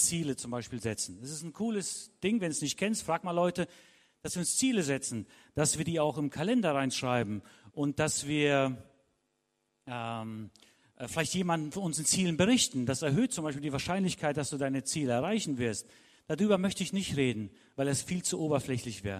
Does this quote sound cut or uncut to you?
uncut